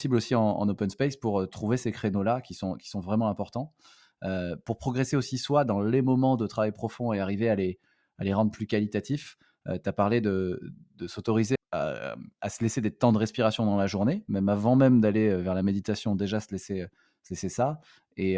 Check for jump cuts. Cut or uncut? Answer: cut